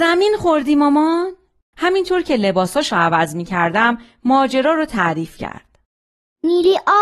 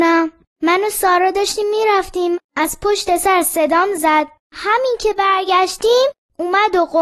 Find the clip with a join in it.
first; 1 cut; at 1.7 s

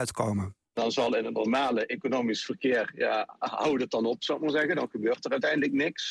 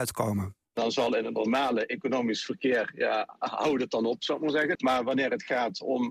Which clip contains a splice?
second; 1 cut; at 4.8 s

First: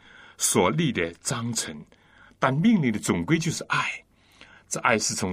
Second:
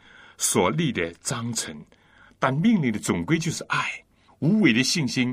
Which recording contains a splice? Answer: second; 1 cut; at 4.3 s

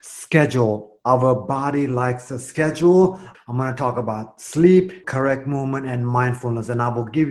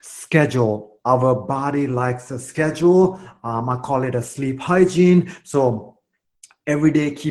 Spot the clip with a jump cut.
first; 2 cuts; at 3.3 s, 5.0 s

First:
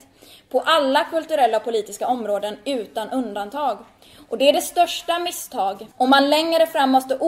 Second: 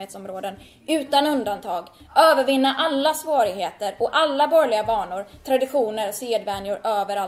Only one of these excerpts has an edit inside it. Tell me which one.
first; 1 cut; at 5.9 s

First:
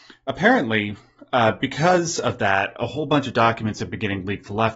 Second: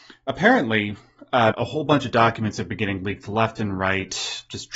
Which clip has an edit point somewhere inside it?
second; 1 cut; at 1.5 s

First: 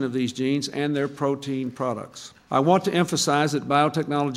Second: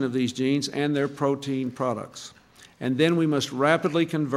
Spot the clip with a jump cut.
first; 1 cut; at 2.5 s

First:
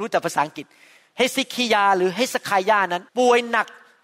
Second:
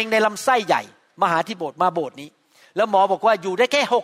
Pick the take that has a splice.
first; 1 cut; at 3.1 s

